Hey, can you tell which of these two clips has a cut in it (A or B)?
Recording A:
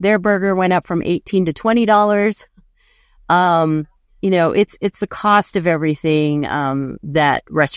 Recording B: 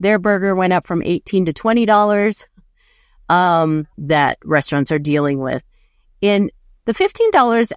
B